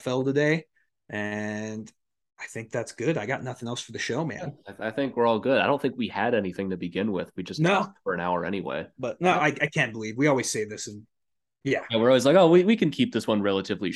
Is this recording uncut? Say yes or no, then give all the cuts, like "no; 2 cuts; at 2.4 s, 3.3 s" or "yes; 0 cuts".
no; 1 cut; at 8.9 s